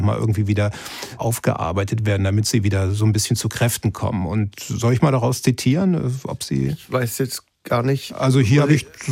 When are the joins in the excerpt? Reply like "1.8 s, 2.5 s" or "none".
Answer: 1.2 s